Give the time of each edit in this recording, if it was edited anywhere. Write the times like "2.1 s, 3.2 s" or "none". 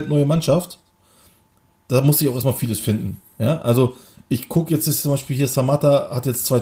none

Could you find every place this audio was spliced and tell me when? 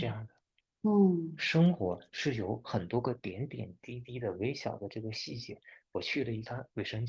none

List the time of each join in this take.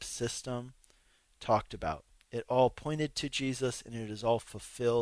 none

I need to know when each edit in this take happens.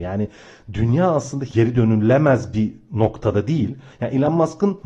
3.9 s

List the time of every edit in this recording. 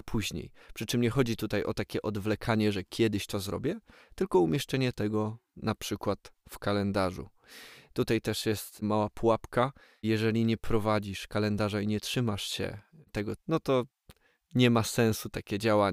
13.4 s

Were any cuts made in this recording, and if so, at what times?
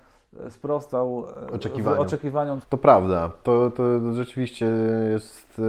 2.6 s

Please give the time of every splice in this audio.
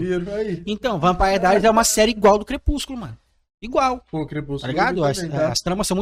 none

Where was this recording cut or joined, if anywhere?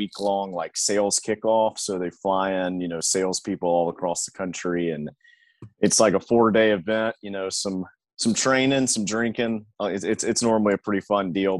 none

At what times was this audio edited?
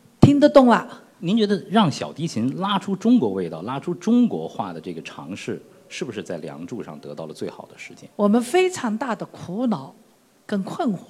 1.1 s, 8.1 s

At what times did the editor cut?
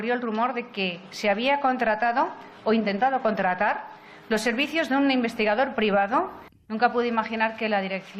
6.6 s

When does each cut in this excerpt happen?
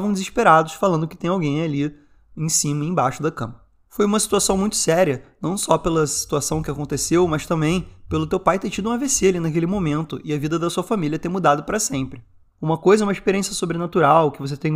none

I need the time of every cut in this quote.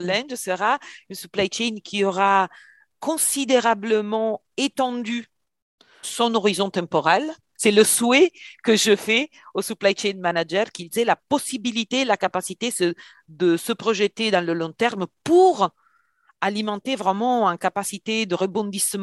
6.0 s

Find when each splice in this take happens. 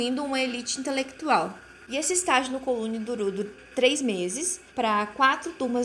4.7 s

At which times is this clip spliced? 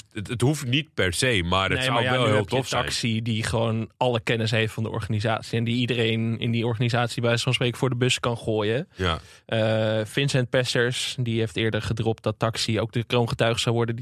none

